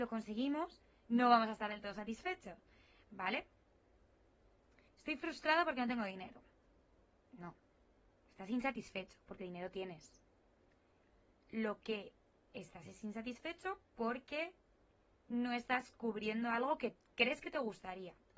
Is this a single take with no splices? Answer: no; 1 cut; at 4.9 s

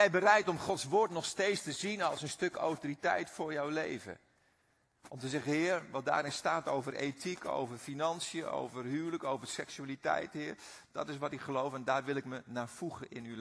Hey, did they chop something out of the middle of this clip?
no; 0 cuts

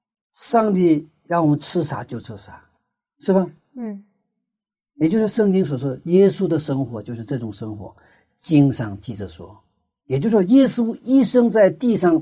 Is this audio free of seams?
yes; 0 cuts

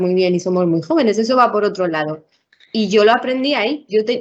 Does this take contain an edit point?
no; 0 cuts

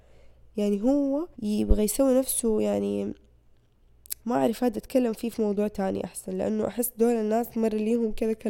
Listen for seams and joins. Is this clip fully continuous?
no; 2 cuts; at 1.3 s, 4.2 s

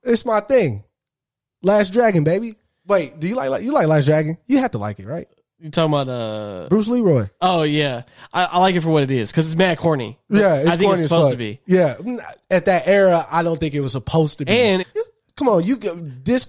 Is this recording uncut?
no; 1 cut; at 14.8 s

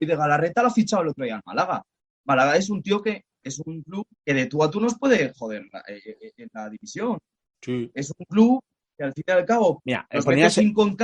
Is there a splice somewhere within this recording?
yes; 2 cuts; at 4.1 s, 9.8 s

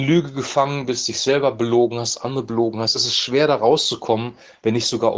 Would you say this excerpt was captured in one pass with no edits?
yes; 0 cuts

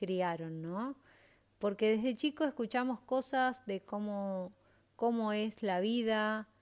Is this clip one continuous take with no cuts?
yes; 0 cuts

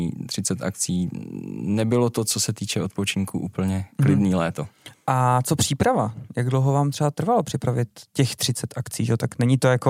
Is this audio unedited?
yes; 0 cuts

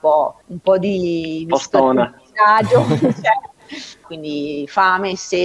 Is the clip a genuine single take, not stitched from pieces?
no; 1 cut; at 4.0 s

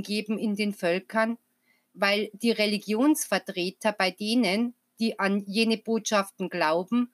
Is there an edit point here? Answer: no; 0 cuts

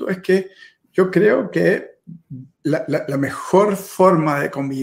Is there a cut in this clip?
yes; 1 cut; at 2.5 s

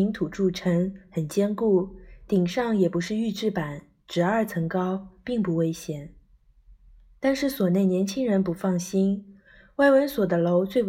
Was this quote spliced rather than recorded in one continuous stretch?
no; 0 cuts

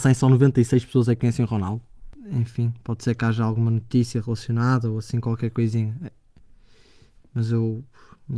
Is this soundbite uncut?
no; 1 cut; at 2.1 s

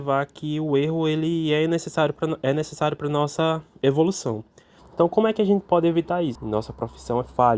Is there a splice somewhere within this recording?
yes; 2 cuts; at 4.8 s, 6.4 s

